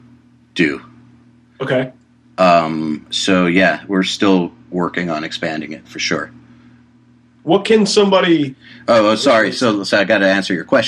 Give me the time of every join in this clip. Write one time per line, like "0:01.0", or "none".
none